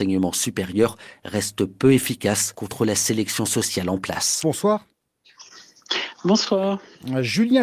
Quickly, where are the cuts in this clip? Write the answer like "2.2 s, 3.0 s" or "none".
4.4 s